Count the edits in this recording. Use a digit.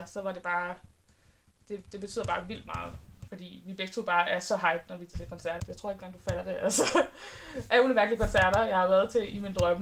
2